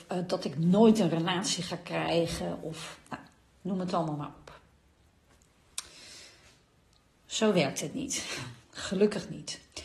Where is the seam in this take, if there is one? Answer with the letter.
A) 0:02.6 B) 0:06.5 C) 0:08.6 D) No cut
C